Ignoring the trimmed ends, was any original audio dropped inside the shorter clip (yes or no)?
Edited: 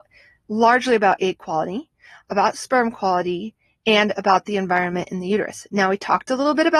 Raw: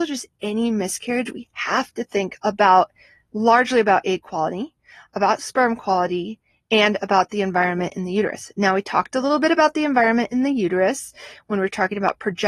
no